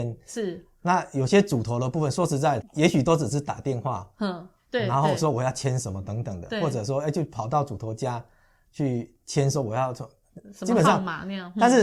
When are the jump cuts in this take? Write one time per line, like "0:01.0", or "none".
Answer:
0:02.6